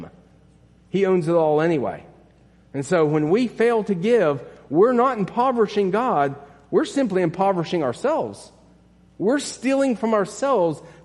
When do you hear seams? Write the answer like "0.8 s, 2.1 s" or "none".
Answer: none